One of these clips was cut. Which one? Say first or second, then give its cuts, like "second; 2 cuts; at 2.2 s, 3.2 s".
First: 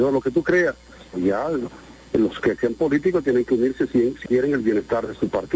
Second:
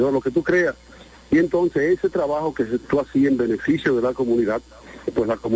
first; 2 cuts; at 1.1 s, 4.3 s